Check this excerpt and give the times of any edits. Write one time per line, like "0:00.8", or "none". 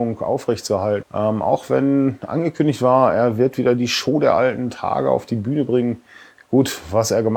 0:01.0